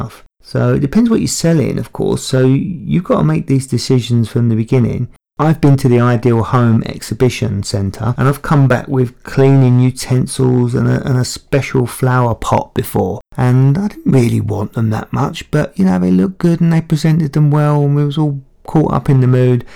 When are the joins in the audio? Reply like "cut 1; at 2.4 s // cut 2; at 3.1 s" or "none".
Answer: none